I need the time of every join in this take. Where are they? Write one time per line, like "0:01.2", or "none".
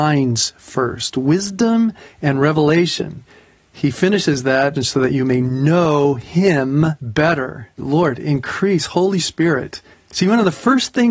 0:04.8
0:07.8
0:09.9

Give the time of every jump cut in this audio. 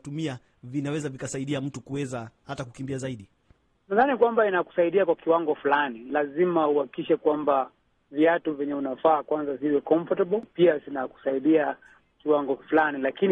none

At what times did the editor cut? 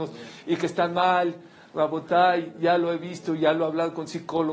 none

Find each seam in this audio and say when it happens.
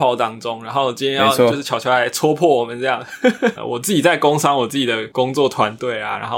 0:03.6

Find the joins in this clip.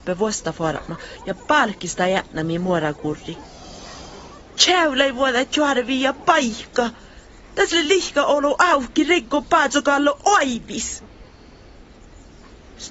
none

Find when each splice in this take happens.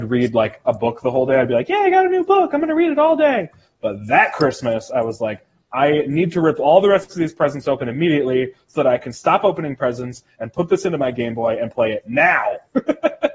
none

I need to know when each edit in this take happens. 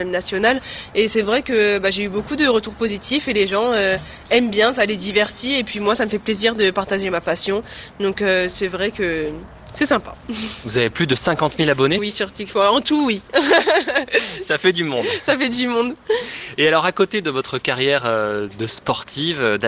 0:12.0

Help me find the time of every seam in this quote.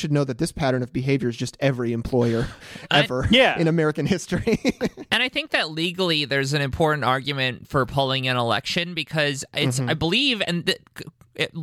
none

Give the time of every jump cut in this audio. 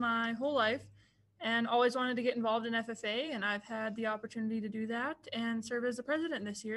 none

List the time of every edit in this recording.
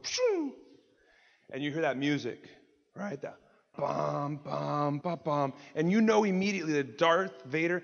0:03.7
0:05.0

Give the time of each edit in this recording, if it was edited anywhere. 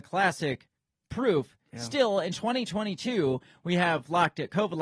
none

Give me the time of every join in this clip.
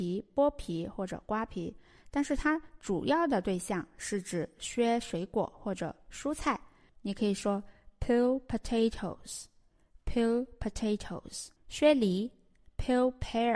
0:06.9
0:11.6

